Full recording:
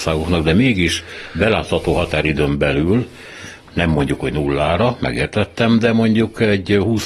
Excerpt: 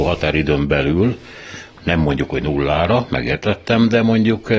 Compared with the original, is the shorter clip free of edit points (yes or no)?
yes